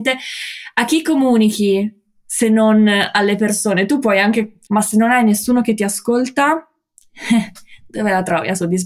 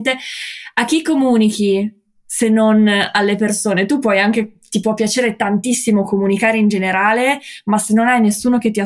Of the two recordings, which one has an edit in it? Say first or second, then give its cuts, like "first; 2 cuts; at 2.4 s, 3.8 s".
first; 1 cut; at 4.7 s